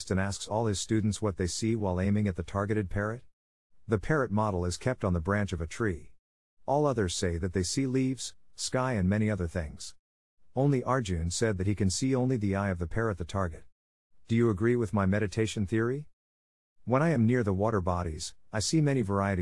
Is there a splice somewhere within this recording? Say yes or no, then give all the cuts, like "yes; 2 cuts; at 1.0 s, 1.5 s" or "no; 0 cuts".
yes; 1 cut; at 8.5 s